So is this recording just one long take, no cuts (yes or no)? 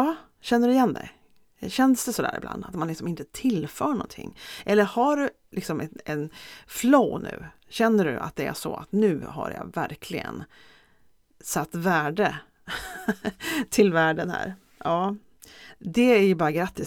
yes